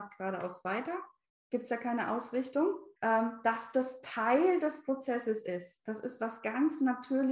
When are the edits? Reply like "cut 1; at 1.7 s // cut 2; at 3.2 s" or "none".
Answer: cut 1; at 3.0 s

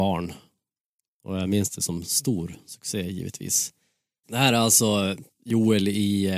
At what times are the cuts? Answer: cut 1; at 4.2 s

